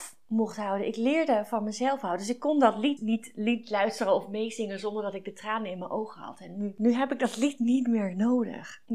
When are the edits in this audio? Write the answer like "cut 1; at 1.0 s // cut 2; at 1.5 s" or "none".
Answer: cut 1; at 3.0 s